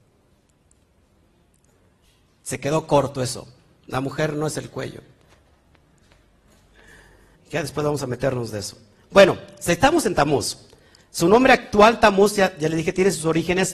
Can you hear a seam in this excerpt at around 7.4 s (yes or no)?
yes